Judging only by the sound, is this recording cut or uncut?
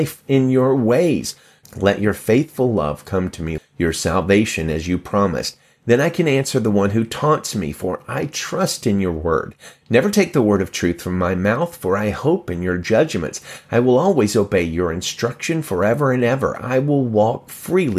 cut